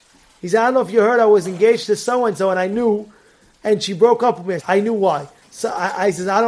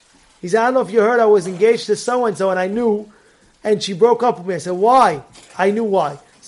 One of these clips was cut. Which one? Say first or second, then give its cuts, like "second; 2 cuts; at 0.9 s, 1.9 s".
first; 1 cut; at 4.6 s